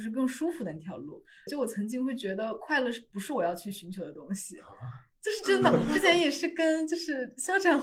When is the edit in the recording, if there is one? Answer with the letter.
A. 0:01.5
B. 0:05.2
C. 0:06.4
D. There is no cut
A